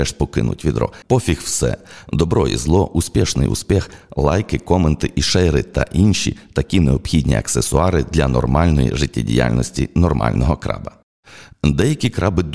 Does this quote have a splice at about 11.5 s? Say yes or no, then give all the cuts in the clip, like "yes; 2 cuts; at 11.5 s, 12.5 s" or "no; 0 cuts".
no; 1 cut; at 1.0 s